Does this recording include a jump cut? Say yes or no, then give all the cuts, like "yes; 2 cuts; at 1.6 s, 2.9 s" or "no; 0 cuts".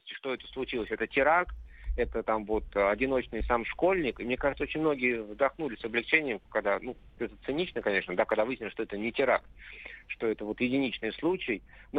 no; 0 cuts